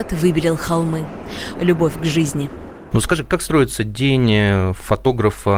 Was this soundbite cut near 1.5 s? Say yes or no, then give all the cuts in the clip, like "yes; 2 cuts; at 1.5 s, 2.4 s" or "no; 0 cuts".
yes; 1 cut; at 1.5 s